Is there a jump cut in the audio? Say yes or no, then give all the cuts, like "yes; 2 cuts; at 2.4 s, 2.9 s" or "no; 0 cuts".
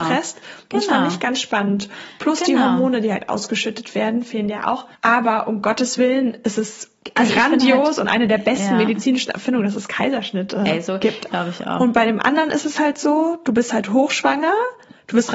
yes; 2 cuts; at 4.9 s, 11.3 s